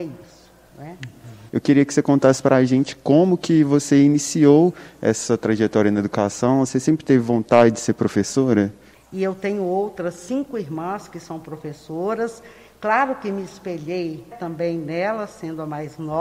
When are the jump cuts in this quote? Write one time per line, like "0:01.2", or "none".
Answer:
0:01.5
0:08.9
0:14.3